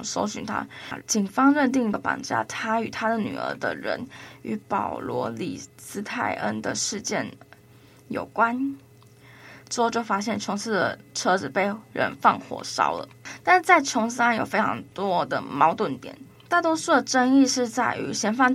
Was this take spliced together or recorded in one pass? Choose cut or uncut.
cut